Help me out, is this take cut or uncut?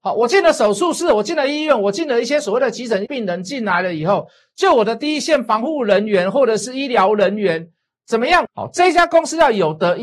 cut